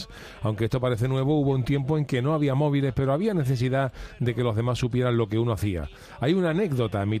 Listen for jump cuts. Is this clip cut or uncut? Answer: uncut